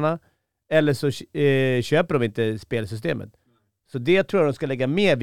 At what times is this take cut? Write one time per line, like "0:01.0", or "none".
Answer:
none